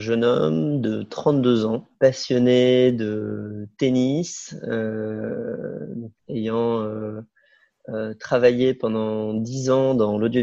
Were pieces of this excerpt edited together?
yes; 2 cuts; at 1.9 s, 6.2 s

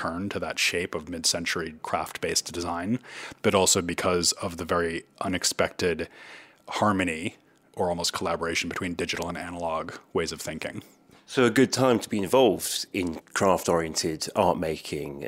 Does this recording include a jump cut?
no; 0 cuts

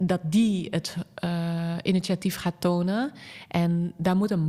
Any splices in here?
no; 0 cuts

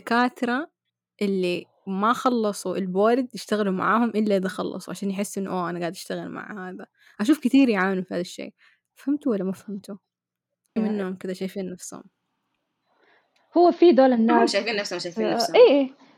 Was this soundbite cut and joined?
yes; 1 cut; at 10.8 s

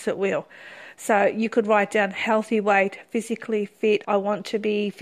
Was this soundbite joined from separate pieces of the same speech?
yes; 1 cut; at 4.0 s

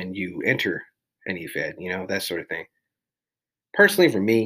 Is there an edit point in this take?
no; 0 cuts

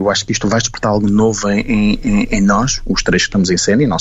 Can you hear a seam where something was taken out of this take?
no; 0 cuts

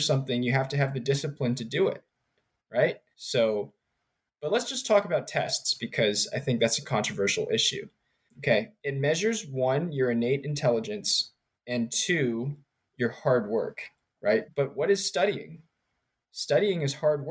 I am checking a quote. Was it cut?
yes; 3 cuts; at 3.1 s, 8.3 s, 14.5 s

